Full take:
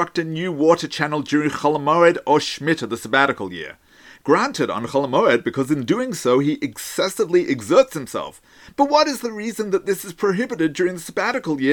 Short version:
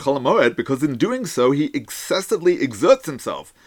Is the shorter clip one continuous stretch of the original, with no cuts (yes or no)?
yes